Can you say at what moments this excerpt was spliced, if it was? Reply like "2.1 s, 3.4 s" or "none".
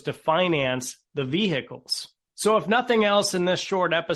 none

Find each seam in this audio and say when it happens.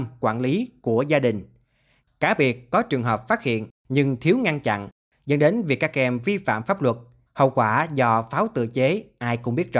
7.3 s

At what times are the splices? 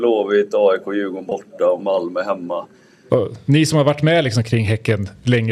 3.1 s

